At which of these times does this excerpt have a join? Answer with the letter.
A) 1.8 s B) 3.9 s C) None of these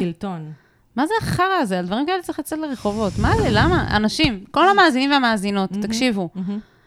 C